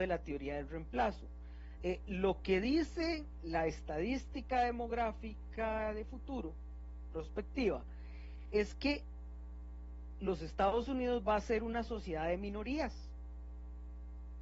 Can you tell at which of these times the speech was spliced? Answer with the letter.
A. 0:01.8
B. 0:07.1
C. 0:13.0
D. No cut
A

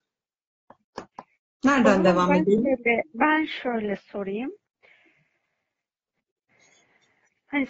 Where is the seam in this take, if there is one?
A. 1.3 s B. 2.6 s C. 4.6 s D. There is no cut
D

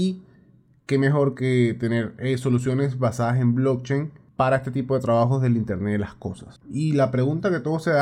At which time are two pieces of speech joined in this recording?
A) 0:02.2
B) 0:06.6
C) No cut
B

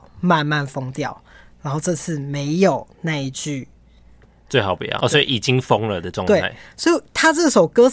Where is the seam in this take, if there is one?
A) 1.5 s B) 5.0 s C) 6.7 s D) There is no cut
B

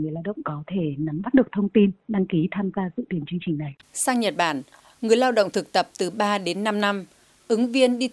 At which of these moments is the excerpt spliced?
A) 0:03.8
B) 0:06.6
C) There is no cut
A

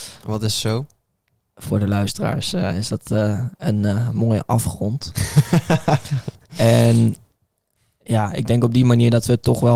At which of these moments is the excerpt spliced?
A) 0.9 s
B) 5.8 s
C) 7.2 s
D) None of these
D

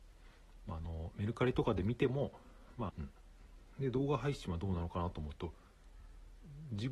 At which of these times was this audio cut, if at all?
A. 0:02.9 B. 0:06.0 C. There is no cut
A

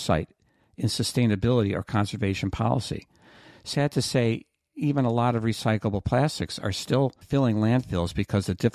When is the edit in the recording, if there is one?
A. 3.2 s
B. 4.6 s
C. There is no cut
C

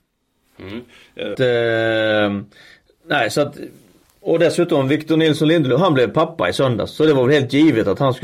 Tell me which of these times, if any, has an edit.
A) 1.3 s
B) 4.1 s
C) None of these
A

